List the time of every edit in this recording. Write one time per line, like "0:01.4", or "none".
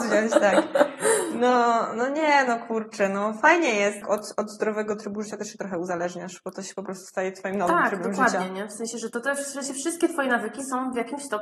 0:04.0